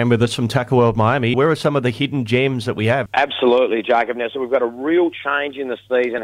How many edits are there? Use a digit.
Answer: 2